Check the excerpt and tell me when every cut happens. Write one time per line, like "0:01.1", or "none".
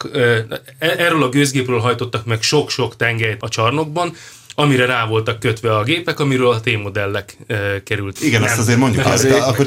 0:03.4
0:08.2